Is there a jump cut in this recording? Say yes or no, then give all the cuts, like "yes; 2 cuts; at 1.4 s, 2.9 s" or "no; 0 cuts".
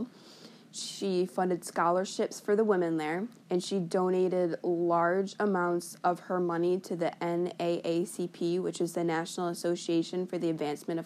yes; 1 cut; at 3.4 s